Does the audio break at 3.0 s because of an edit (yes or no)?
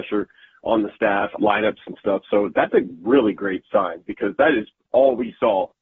no